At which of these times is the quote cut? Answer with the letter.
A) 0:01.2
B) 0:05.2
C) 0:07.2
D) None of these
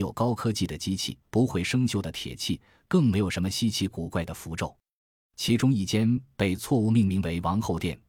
A